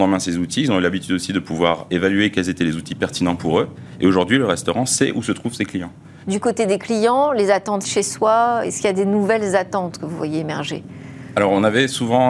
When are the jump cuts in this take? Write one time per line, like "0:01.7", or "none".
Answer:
0:06.2
0:07.8